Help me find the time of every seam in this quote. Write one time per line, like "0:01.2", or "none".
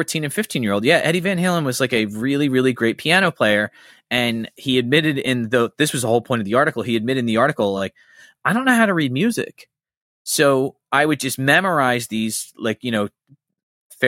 none